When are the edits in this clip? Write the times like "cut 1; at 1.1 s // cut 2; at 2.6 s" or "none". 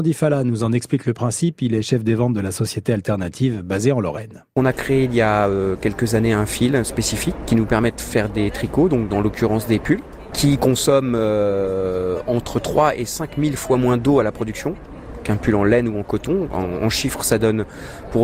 none